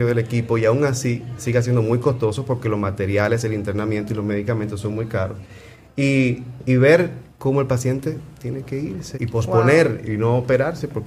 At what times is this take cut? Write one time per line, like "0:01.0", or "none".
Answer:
0:07.3
0:09.1